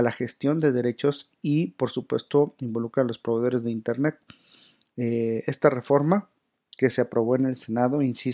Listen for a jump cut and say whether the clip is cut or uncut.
uncut